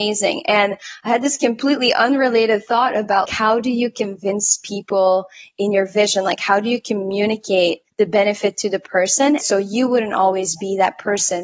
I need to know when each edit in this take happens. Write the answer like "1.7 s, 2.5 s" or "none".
9.4 s